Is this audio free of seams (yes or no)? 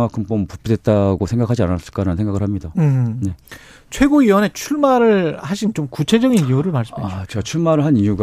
yes